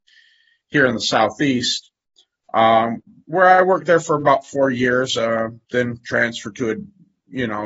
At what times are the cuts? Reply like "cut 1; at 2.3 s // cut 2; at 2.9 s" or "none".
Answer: none